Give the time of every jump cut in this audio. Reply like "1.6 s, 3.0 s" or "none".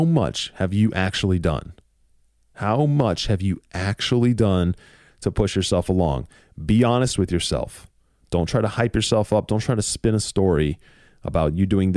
8.2 s